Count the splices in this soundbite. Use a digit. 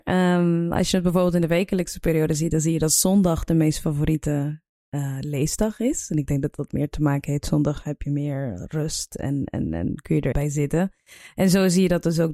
1